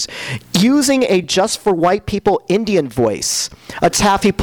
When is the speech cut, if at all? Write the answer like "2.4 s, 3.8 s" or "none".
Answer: none